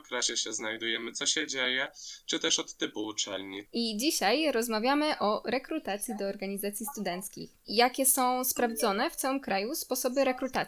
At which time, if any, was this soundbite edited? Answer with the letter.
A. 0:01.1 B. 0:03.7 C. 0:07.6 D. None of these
B